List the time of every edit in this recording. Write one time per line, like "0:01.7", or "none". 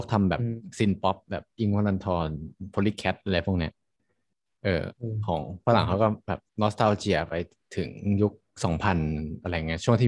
0:06.5